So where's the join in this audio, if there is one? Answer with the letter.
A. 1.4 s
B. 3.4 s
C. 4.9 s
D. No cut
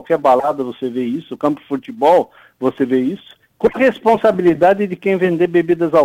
D